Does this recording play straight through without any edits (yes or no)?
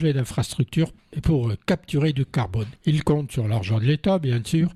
no